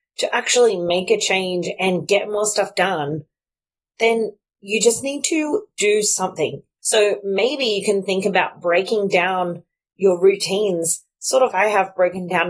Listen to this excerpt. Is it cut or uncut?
cut